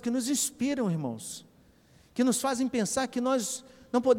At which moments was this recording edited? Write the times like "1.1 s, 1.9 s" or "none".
none